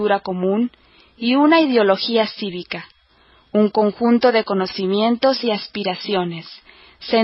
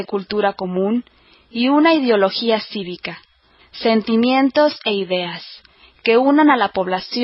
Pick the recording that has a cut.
second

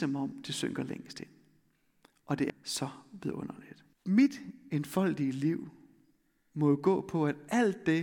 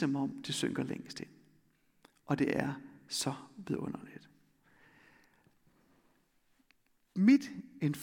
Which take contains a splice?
first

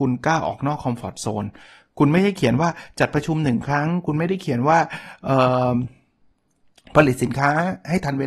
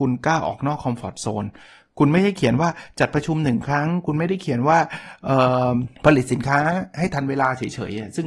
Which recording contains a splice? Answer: second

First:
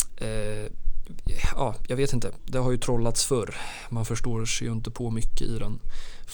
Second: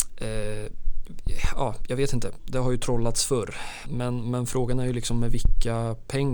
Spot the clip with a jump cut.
second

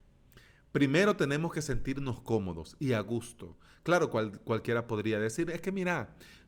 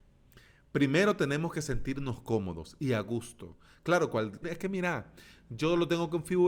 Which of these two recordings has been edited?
second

